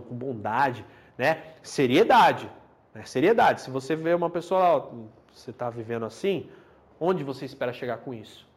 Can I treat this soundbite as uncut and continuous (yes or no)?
yes